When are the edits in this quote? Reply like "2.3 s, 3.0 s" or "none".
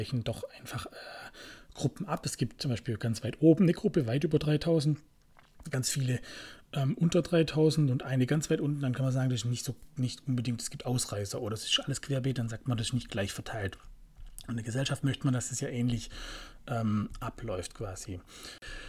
none